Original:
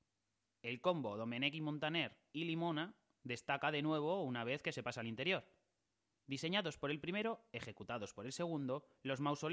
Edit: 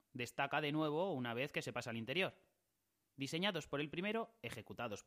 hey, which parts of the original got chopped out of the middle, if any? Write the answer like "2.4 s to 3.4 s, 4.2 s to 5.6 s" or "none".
none